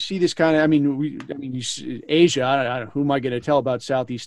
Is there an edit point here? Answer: no; 0 cuts

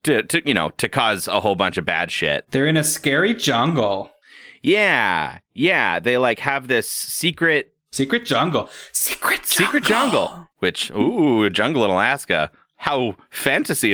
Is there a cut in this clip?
yes; 1 cut; at 10.5 s

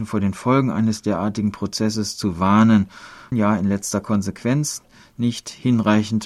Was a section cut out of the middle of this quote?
yes; 1 cut; at 3.3 s

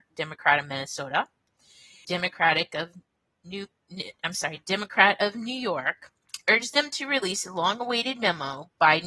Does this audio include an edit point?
yes; 1 cut; at 2.0 s

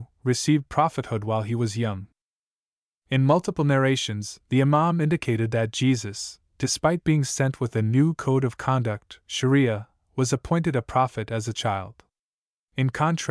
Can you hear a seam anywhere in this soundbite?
no; 0 cuts

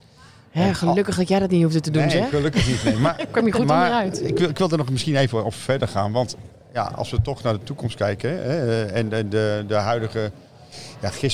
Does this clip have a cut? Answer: no; 0 cuts

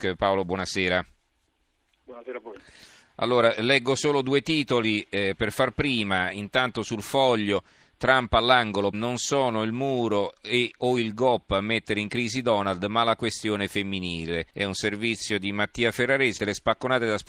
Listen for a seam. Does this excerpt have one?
yes; 3 cuts; at 8.9 s, 14.5 s, 16.4 s

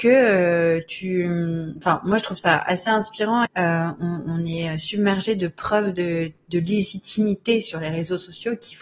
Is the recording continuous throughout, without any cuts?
no; 1 cut; at 3.5 s

